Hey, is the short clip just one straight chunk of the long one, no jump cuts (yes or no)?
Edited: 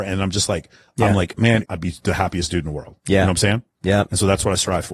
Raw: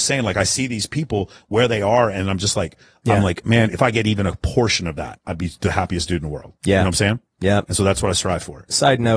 no